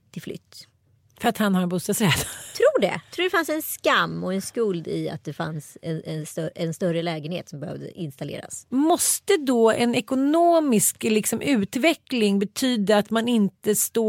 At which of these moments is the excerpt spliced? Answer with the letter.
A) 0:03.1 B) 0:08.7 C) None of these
B